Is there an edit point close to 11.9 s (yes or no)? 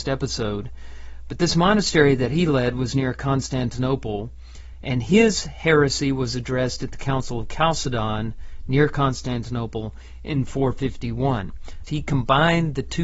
yes